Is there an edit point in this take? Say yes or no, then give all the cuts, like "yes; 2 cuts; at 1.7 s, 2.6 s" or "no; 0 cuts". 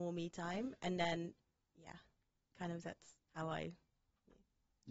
yes; 1 cut; at 3.2 s